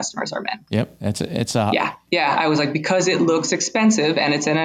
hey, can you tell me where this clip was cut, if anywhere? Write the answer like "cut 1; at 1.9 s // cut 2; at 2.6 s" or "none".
none